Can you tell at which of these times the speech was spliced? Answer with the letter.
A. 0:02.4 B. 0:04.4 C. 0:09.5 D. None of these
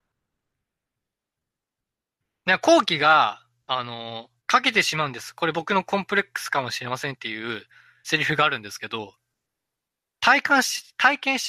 B